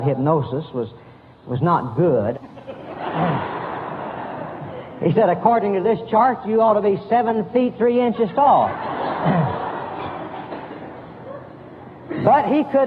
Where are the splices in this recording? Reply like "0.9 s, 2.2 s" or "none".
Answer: 2.3 s